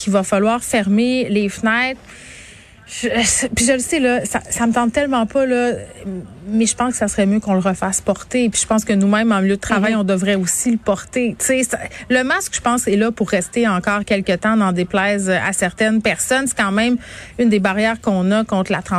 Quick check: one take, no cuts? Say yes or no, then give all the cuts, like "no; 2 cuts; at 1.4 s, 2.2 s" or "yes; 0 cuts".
yes; 0 cuts